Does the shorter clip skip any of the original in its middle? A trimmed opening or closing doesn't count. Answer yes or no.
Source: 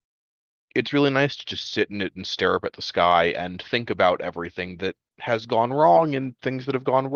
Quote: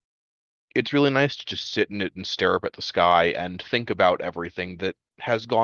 no